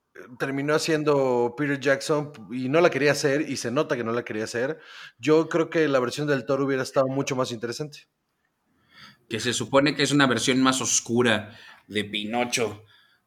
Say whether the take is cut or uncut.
cut